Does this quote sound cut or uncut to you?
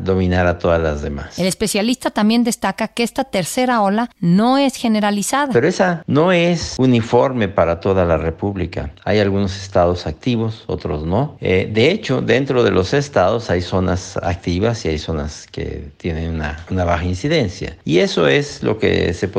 uncut